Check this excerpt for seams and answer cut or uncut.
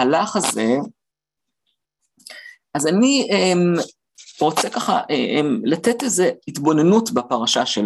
uncut